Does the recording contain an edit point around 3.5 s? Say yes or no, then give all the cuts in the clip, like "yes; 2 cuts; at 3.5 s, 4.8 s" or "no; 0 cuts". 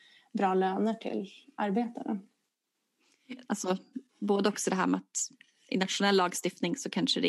yes; 1 cut; at 3.5 s